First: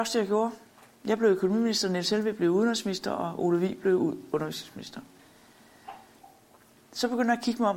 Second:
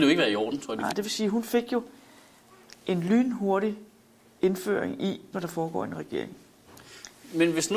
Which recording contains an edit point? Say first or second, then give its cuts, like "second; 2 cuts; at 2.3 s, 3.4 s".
second; 2 cuts; at 0.9 s, 5.3 s